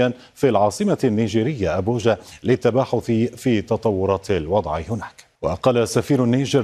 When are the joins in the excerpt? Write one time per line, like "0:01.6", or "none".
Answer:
0:05.3